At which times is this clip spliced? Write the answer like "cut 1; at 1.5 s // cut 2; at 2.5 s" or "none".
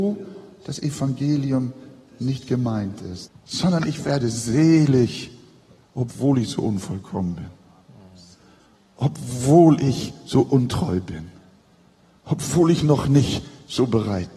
cut 1; at 3.3 s